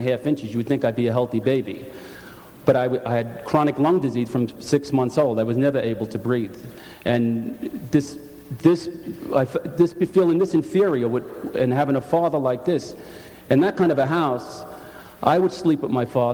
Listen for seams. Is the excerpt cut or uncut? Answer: uncut